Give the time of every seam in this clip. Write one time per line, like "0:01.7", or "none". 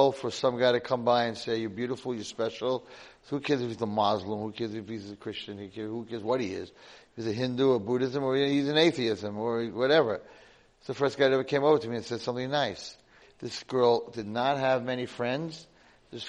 0:13.2